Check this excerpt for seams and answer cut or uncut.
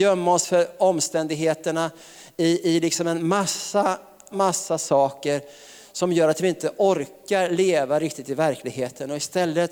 cut